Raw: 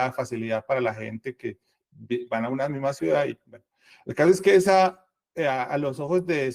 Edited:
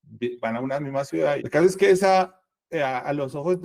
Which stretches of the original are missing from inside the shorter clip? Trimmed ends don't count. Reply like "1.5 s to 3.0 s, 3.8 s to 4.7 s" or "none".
3.3 s to 4.0 s